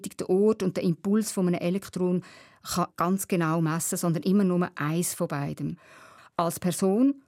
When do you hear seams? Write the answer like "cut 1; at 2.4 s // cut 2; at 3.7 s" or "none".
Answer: cut 1; at 6.2 s